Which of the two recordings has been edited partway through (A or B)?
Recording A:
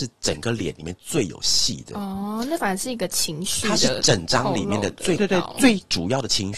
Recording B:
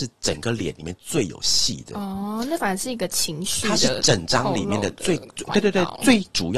A